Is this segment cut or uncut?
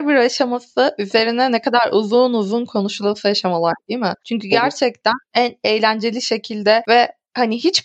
uncut